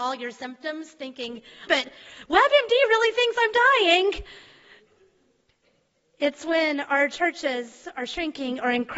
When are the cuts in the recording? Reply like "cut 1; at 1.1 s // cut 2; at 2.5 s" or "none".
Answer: cut 1; at 1.7 s